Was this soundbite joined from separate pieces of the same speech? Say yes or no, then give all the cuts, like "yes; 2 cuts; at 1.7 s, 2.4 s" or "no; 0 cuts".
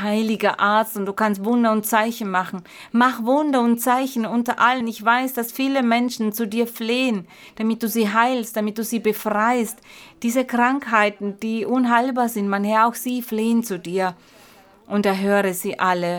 no; 0 cuts